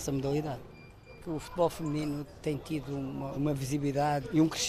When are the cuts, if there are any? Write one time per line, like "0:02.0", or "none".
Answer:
0:03.3